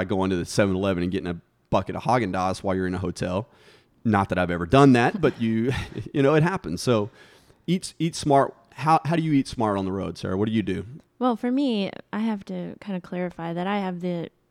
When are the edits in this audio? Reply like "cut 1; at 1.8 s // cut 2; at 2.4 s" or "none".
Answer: cut 1; at 11.0 s